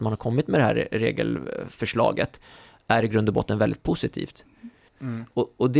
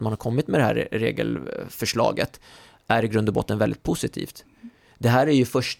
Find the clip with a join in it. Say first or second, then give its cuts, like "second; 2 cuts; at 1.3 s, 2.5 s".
first; 1 cut; at 4.9 s